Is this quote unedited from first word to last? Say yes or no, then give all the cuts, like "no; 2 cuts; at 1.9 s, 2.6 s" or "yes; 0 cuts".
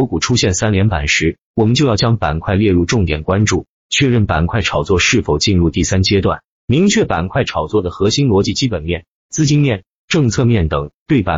yes; 0 cuts